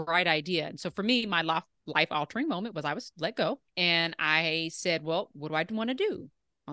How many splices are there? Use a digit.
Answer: 1